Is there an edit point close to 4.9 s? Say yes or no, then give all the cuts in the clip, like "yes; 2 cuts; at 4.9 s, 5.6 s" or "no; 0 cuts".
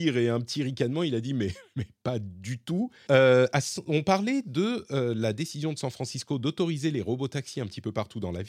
no; 1 cut; at 3.1 s